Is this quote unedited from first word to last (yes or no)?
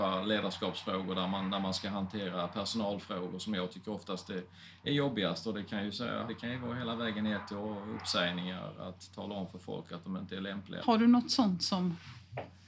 no